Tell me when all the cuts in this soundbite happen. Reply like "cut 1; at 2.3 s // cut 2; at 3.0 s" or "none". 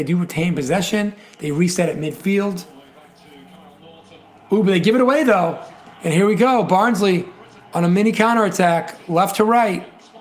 none